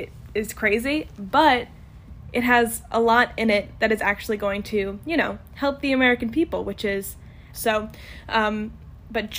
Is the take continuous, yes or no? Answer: no